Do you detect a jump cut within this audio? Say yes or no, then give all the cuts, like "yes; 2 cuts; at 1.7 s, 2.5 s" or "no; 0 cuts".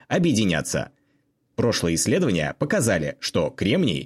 no; 0 cuts